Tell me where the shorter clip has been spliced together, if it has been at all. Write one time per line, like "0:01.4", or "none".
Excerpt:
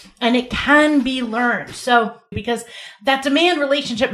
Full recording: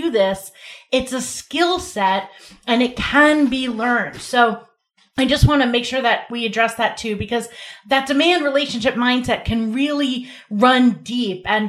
0:02.3

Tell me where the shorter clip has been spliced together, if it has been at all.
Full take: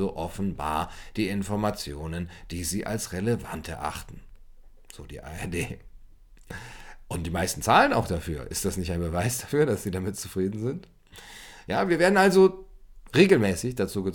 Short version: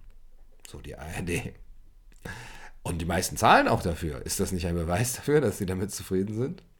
none

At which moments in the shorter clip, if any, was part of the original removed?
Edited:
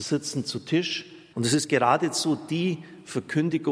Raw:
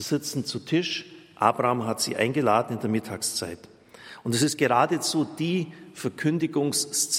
0:01.3

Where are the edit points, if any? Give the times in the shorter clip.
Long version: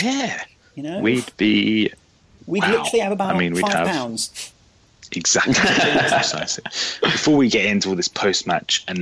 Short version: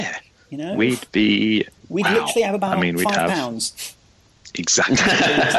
0:01.8

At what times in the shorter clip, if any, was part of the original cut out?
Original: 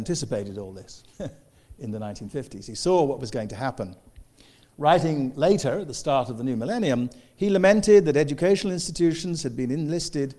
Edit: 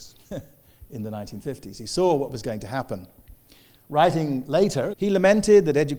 0:04.9

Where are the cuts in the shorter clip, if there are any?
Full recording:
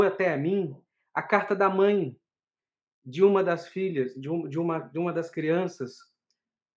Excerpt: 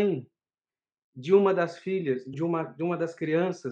0:02.3

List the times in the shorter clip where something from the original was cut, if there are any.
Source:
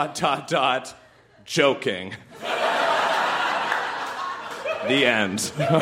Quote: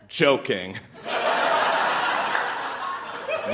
none

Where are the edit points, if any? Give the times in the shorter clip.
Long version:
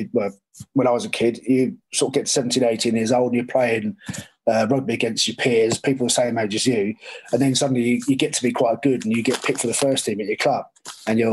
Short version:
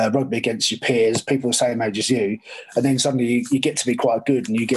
none

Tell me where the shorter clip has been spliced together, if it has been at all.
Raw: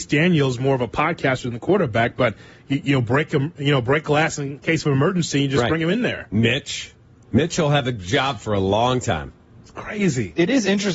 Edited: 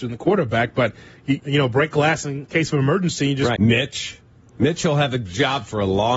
0:01.4
0:03.6

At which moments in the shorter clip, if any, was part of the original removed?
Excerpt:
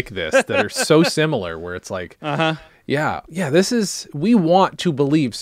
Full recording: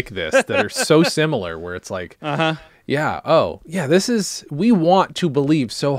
0:03.2

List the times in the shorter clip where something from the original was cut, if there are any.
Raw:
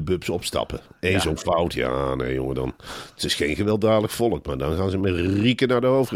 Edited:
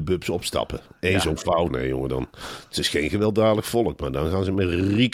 0:01.7

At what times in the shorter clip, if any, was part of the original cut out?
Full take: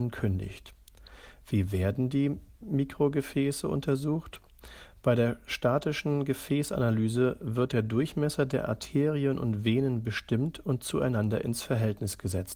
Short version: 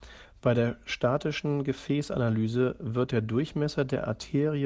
none

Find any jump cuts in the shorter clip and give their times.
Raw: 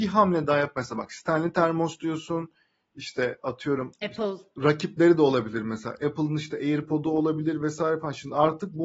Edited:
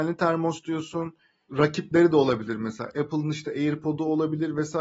0:01.5

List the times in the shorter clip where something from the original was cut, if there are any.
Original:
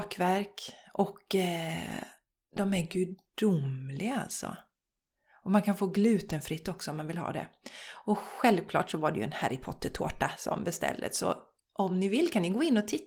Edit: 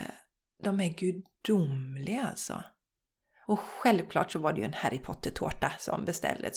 0:03.4

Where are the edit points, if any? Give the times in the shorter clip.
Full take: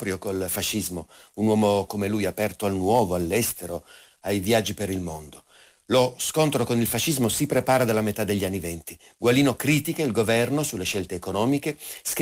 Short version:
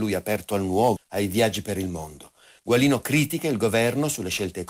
0:01.0
0:02.6

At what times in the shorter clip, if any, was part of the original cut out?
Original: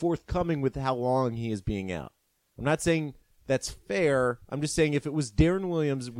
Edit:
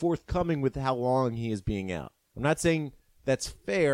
0:02.2

